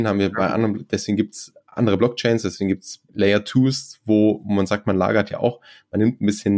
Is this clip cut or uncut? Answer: cut